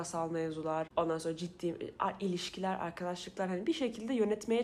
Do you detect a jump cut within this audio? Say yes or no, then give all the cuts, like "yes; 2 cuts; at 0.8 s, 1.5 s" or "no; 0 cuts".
no; 0 cuts